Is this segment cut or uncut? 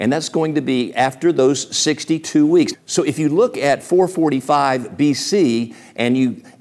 cut